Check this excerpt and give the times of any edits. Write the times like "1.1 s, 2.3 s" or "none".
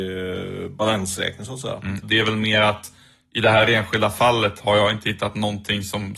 2.0 s